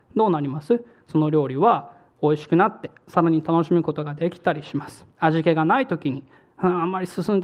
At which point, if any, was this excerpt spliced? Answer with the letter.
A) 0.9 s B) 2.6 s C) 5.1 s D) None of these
C